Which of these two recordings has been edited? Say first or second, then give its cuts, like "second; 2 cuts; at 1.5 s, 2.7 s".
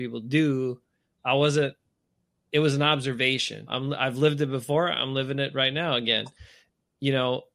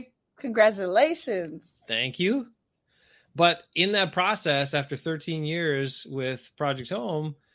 first; 1 cut; at 3.7 s